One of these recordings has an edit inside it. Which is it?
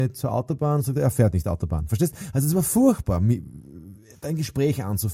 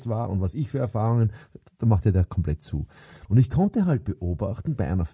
second; 1 cut; at 3.3 s

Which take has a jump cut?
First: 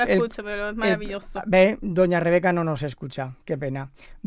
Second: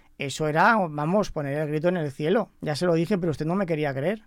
second; 1 cut; at 2.5 s

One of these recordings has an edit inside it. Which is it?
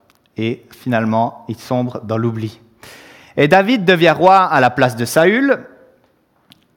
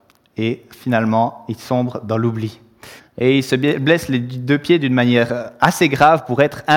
second; 1 cut; at 3.0 s

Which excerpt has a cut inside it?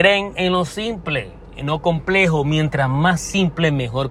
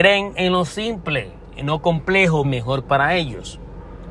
second; 1 cut; at 2.4 s

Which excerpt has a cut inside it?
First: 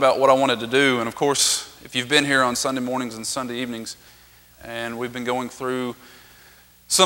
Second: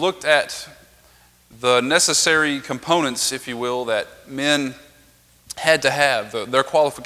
first; 1 cut; at 4.6 s

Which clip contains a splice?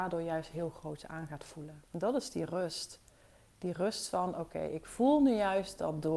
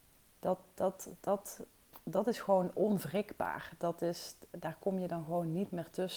first; 1 cut; at 1.9 s

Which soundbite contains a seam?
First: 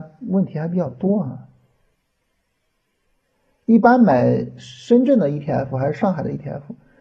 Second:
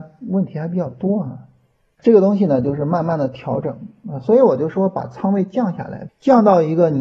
second; 2 cuts; at 2.0 s, 6.1 s

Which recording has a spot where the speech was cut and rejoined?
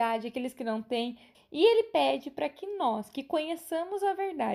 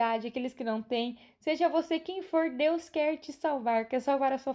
first; 1 cut; at 1.3 s

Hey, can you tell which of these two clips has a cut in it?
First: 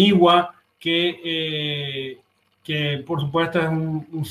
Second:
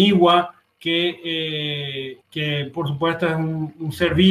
second; 1 cut; at 2.2 s

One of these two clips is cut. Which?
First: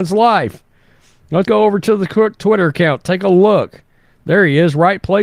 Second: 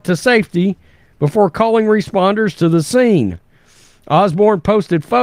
first; 1 cut; at 1.5 s

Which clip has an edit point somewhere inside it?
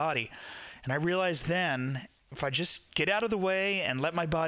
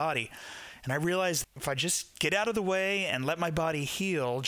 second; 1 cut; at 1.4 s

